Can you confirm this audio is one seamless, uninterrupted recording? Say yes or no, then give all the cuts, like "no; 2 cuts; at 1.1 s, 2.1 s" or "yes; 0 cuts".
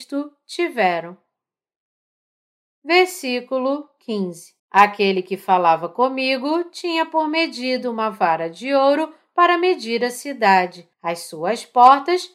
no; 2 cuts; at 4.6 s, 10.9 s